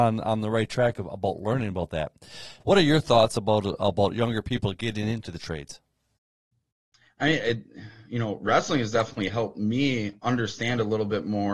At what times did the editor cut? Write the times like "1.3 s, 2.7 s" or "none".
2.6 s